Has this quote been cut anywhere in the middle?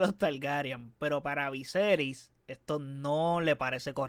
yes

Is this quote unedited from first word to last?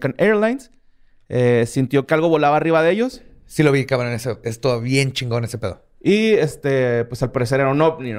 yes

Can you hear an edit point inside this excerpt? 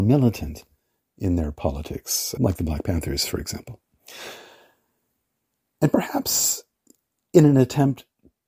yes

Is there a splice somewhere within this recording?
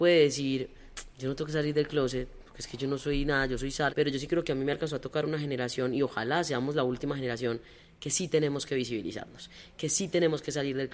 yes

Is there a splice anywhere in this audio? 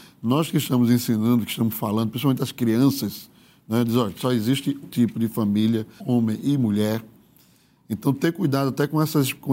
yes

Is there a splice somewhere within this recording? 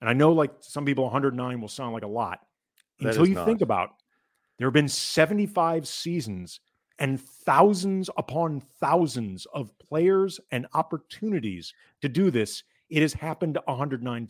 no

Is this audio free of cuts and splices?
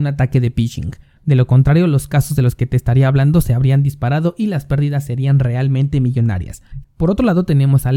no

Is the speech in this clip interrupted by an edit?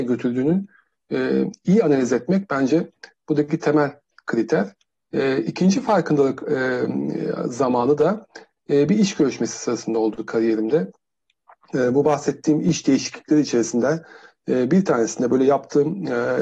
no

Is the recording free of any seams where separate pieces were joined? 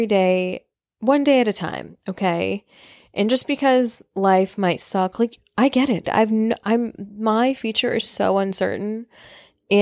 no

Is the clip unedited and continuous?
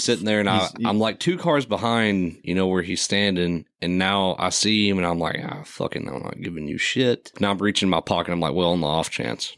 no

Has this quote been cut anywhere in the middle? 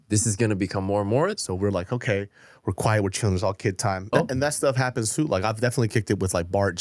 yes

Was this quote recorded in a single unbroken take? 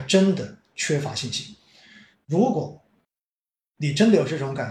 no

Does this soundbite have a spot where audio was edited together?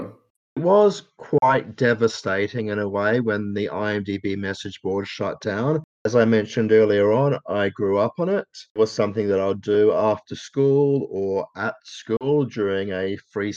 no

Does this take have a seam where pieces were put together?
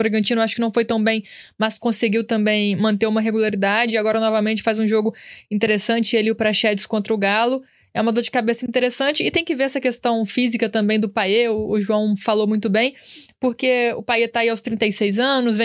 no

